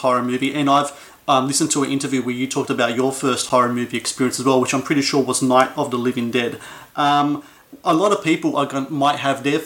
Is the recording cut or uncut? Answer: uncut